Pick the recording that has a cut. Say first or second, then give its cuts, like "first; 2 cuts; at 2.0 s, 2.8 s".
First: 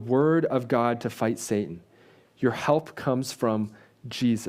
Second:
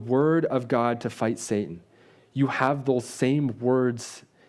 first; 1 cut; at 2.2 s